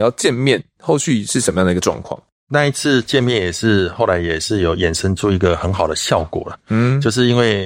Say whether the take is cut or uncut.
uncut